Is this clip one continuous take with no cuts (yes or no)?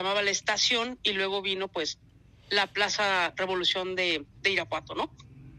yes